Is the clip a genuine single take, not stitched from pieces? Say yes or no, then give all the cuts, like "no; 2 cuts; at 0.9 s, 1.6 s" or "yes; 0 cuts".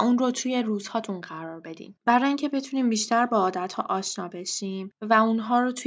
no; 1 cut; at 2.0 s